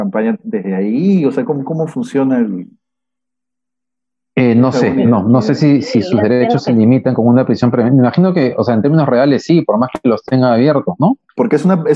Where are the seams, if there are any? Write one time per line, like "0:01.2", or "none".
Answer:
none